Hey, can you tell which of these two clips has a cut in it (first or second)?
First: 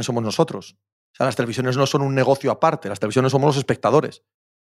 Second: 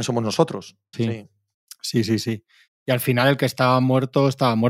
second